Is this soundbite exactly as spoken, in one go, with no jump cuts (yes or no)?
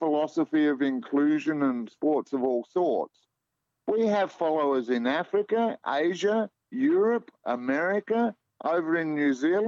yes